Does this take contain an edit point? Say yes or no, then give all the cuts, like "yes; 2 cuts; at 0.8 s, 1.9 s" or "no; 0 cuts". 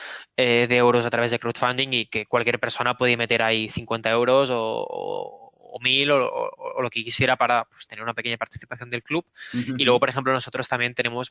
no; 0 cuts